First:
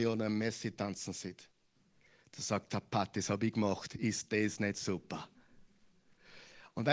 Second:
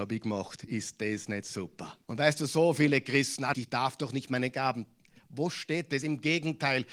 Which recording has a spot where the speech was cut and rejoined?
second; 2 cuts; at 2.0 s, 3.5 s

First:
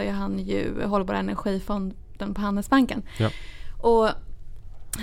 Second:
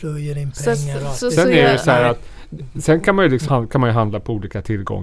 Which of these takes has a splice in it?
second; 1 cut; at 3.5 s

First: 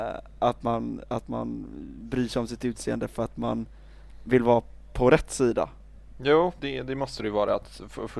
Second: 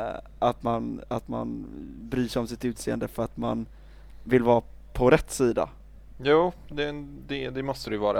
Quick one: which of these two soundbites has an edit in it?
first; 1 cut; at 6.6 s

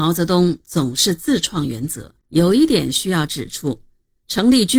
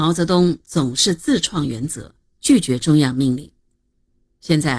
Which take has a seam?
first; 1 cut; at 2.2 s

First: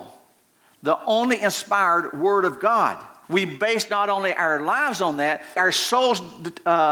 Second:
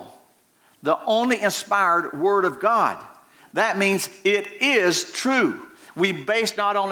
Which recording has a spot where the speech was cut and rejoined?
first; 2 cuts; at 3.2 s, 5.6 s

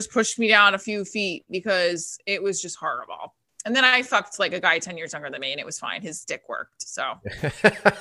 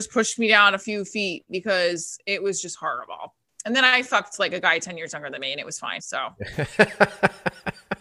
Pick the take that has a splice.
second; 1 cut; at 6.0 s

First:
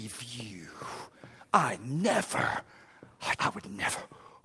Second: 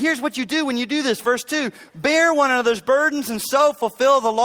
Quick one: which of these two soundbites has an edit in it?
first; 1 cut; at 3.4 s

